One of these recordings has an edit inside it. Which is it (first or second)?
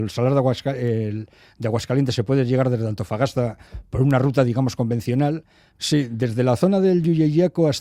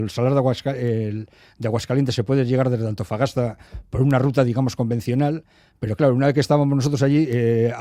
first